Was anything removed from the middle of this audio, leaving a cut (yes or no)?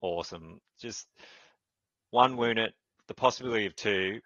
no